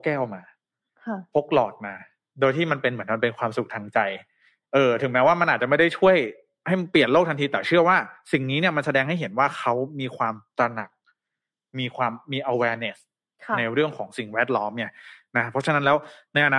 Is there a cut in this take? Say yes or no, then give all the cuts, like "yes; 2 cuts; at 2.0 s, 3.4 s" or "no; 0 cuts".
no; 0 cuts